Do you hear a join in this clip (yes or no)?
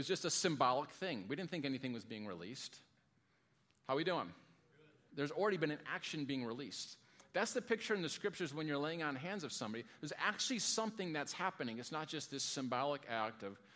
yes